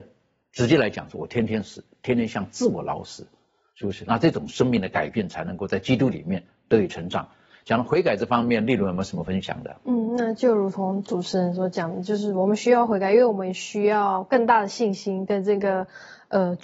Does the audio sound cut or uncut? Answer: uncut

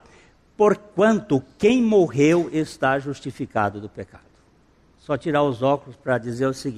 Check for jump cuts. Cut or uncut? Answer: uncut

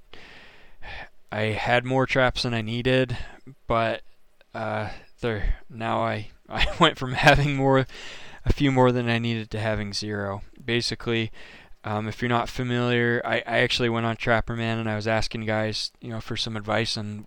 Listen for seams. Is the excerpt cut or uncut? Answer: uncut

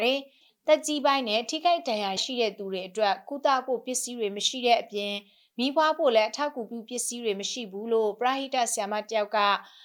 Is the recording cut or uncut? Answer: cut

